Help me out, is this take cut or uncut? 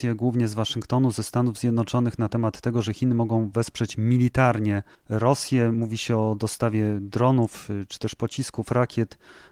uncut